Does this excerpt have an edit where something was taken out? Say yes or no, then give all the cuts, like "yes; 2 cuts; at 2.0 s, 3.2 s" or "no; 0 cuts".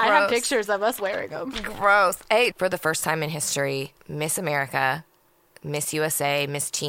yes; 2 cuts; at 2.5 s, 4.0 s